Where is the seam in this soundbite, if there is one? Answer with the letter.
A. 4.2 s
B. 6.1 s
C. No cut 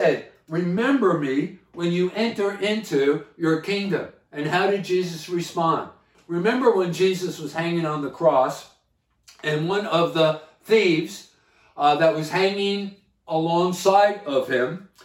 B